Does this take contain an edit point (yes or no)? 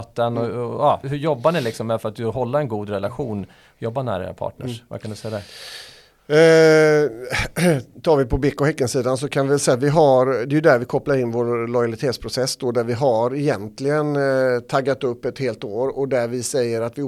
yes